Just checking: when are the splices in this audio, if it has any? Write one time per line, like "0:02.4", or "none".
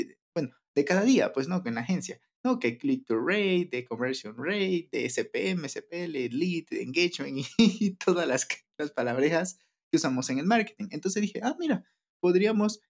none